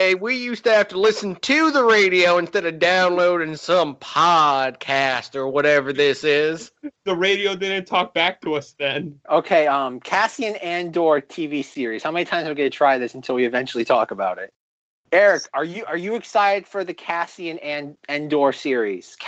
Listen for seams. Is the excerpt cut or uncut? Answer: cut